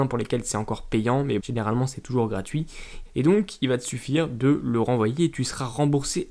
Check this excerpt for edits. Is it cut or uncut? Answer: cut